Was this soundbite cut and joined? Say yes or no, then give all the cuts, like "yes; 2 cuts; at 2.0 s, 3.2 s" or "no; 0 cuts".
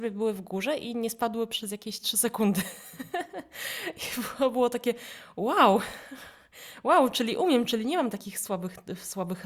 no; 0 cuts